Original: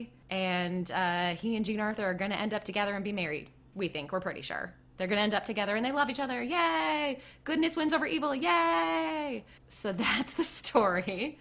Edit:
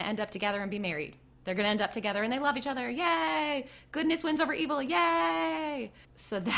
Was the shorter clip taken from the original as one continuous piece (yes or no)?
no